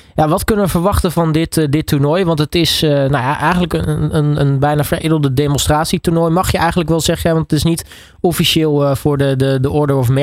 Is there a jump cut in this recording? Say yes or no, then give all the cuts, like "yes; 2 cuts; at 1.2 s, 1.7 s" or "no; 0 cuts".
no; 0 cuts